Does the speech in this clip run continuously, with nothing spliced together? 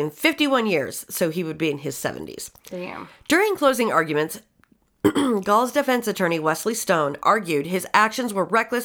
yes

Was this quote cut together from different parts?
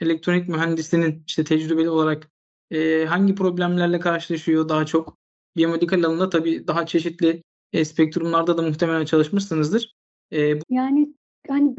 yes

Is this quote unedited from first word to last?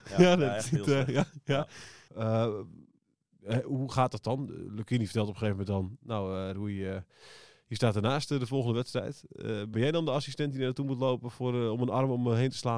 no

